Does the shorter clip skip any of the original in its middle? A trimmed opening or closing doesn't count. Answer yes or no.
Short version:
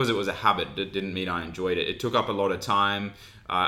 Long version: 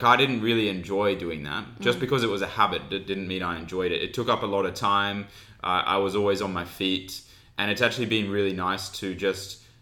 no